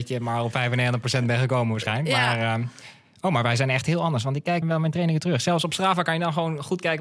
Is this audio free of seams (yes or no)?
no